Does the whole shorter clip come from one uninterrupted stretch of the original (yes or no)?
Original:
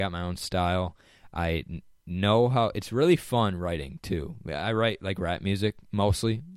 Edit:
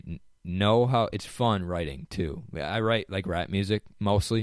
no